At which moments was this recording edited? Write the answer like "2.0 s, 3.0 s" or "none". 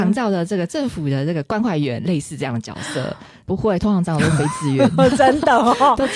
3.5 s